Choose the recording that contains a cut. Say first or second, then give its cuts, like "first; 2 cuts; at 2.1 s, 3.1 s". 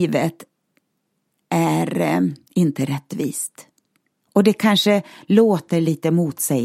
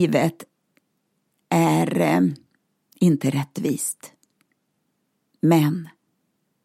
first; 2 cuts; at 2.4 s, 4.2 s